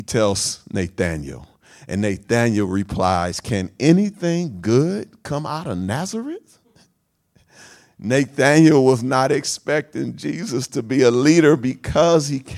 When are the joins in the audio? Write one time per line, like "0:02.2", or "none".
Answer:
none